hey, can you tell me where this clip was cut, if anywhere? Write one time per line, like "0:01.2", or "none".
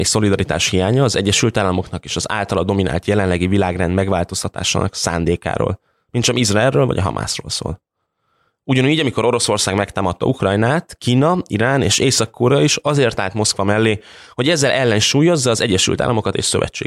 none